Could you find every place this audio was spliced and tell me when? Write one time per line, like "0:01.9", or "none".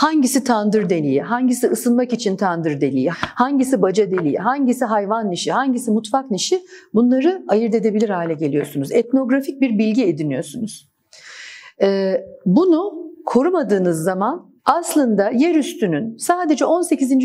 0:03.1
0:14.6